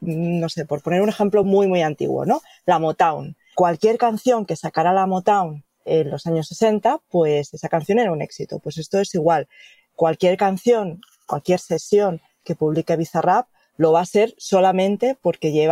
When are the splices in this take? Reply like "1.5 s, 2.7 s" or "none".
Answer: none